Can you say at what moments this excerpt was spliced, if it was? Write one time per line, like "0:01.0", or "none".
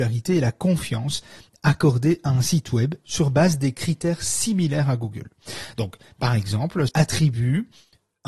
0:06.9